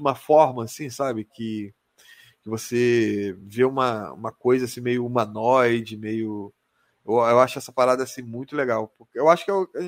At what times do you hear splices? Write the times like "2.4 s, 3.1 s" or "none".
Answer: none